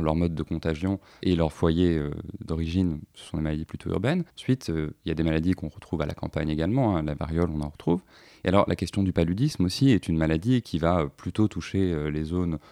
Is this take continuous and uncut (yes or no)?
yes